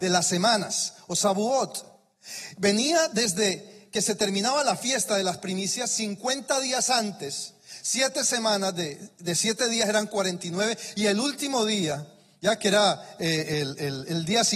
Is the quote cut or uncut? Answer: uncut